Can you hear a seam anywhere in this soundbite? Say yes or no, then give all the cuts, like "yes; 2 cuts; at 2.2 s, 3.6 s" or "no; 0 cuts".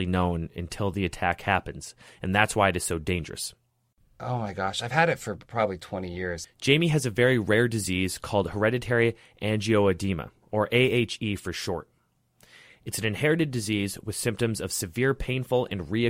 yes; 1 cut; at 6.4 s